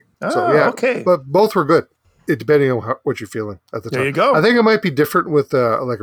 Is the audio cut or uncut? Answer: uncut